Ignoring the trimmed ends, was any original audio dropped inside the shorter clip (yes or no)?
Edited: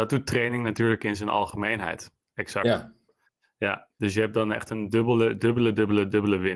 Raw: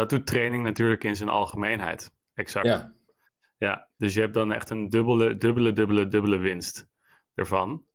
no